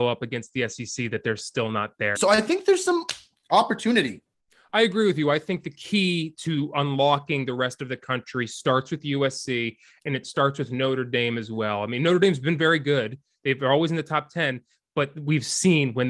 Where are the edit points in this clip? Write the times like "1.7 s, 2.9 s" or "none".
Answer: 2.1 s